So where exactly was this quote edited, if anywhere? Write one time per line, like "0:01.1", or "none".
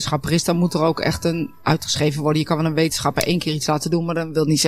0:01.6